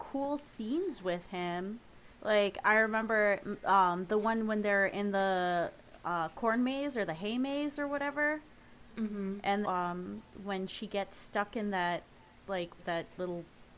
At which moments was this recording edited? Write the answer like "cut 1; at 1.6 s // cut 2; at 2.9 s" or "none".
cut 1; at 2.1 s // cut 2; at 9.6 s // cut 3; at 12.8 s